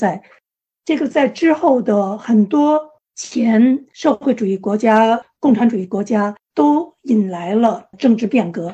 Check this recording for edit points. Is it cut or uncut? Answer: uncut